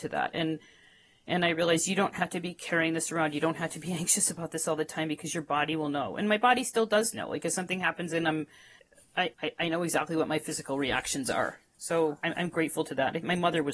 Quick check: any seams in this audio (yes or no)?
yes